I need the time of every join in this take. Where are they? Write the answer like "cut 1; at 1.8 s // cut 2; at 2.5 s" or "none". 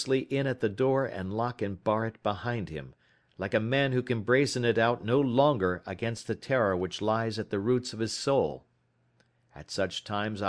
none

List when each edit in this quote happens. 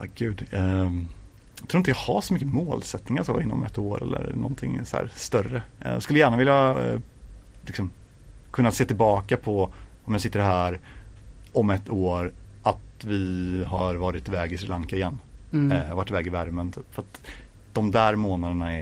cut 1; at 6.7 s

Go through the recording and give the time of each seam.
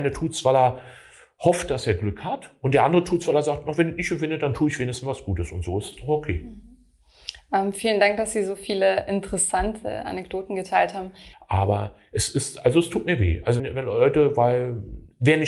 cut 1; at 11.3 s // cut 2; at 13.6 s

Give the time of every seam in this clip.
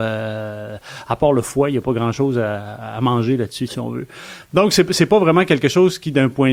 cut 1; at 3.7 s

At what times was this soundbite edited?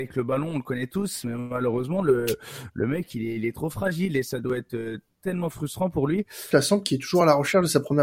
cut 1; at 6.5 s

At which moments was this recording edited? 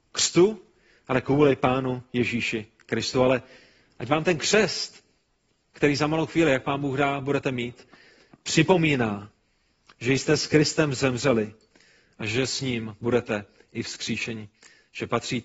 none

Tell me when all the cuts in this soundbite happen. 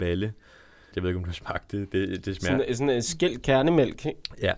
cut 1; at 0.9 s

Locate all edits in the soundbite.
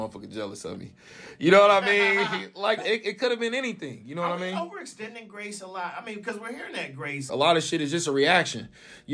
cut 1; at 2.8 s // cut 2; at 7.3 s

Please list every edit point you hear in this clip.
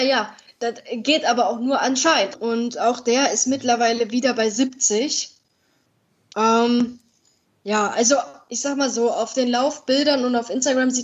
cut 1; at 2.3 s

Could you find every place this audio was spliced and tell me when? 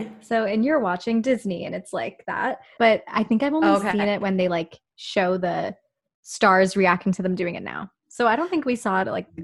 cut 1; at 2.8 s

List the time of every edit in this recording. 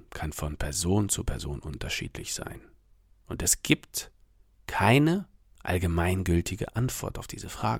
none

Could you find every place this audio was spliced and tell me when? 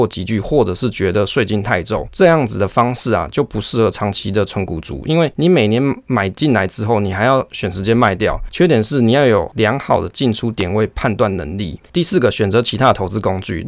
none

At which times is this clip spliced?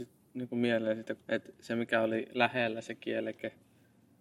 cut 1; at 1.2 s

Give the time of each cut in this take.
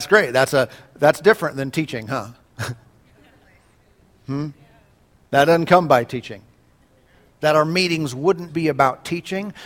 cut 1; at 7.3 s // cut 2; at 8.5 s

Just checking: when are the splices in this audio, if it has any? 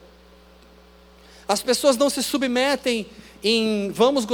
none

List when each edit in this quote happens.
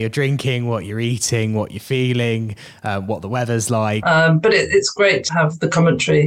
cut 1; at 4.0 s // cut 2; at 5.3 s

